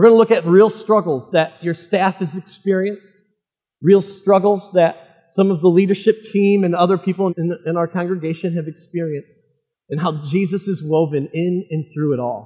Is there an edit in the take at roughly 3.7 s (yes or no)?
no